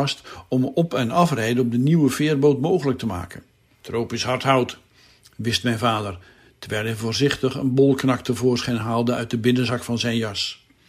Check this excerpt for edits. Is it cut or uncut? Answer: cut